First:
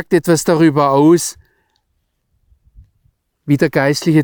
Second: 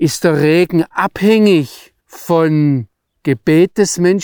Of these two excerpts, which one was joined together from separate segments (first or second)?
second